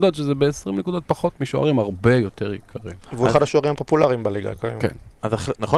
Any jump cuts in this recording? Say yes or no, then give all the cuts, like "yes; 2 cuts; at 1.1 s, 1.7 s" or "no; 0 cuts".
no; 0 cuts